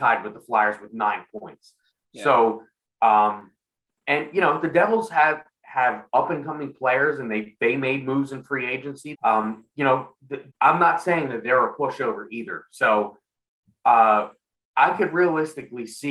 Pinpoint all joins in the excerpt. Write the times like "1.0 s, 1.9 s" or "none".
9.1 s, 10.5 s